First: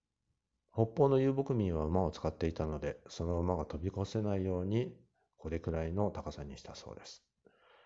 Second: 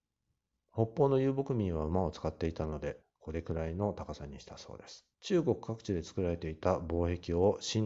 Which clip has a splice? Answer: second; 2 cuts; at 3.0 s, 5.1 s

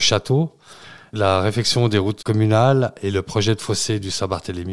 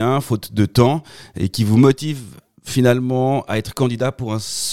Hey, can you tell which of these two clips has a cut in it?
first; 1 cut; at 2.2 s

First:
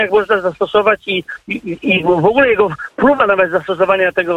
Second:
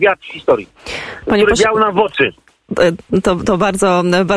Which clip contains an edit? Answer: first; 1 cut; at 1.8 s

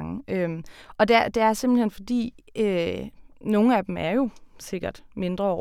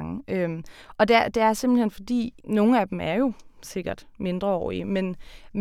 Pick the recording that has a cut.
second; 1 cut; at 2.4 s

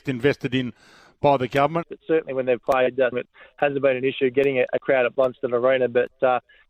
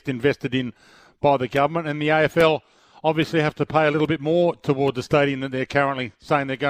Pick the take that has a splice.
first; 2 cuts; at 1.8 s, 3.1 s

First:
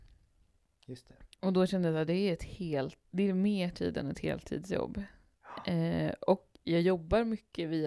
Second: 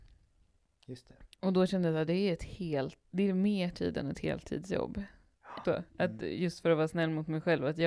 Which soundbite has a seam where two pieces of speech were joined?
second; 1 cut; at 5.6 s

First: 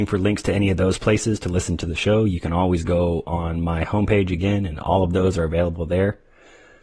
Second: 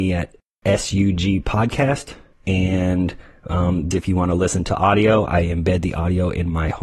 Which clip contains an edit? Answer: second; 2 cuts; at 2.3 s, 3.9 s

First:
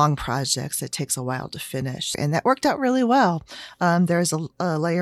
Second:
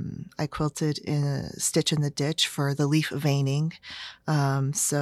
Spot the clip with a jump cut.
first; 1 cut; at 2.1 s

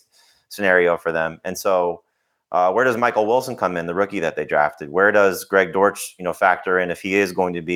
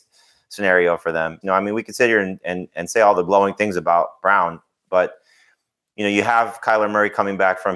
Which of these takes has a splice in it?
second; 1 cut; at 1.4 s

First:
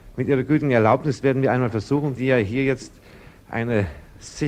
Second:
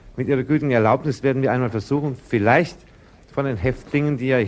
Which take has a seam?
first; 1 cut; at 2.2 s

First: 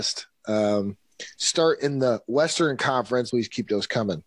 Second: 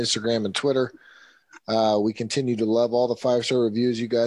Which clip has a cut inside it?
first; 1 cut; at 3.3 s

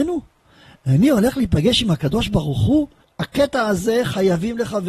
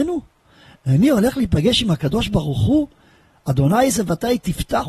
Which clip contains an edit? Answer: first; 1 cut; at 3.0 s

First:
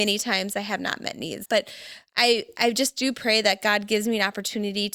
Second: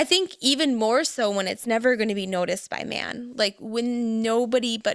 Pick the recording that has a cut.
first; 1 cut; at 1.4 s

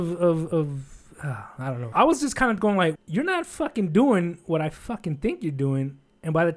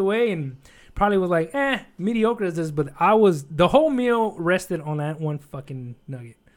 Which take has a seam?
first; 2 cuts; at 1.9 s, 3.0 s

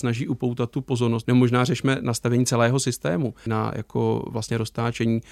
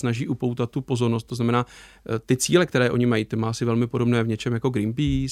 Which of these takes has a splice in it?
first; 2 cuts; at 1.2 s, 3.5 s

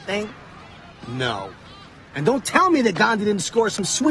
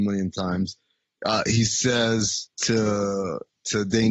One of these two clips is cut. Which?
second; 1 cut; at 2.5 s

